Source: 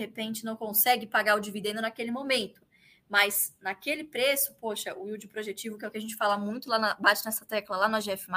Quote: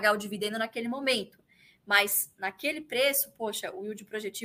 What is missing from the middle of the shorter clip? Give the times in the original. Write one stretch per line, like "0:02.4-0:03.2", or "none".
none